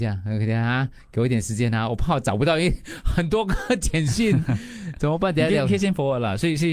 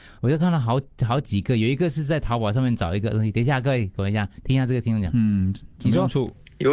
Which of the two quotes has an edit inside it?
second; 1 cut; at 5.7 s

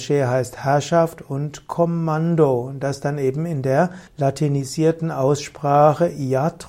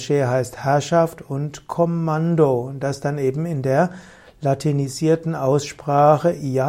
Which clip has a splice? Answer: first; 1 cut; at 4.1 s

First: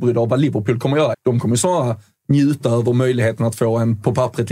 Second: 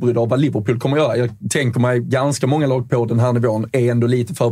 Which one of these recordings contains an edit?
first; 1 cut; at 1.1 s

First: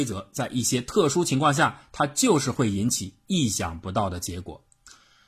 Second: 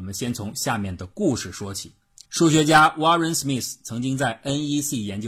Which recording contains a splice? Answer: second; 1 cut; at 2.3 s

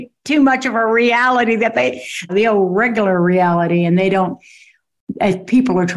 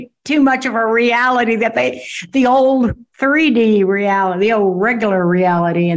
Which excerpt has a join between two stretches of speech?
first; 1 cut; at 2.3 s

